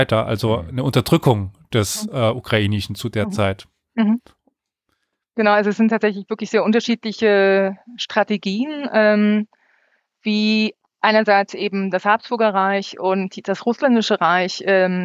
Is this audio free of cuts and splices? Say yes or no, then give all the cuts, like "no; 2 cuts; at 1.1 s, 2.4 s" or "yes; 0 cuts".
yes; 0 cuts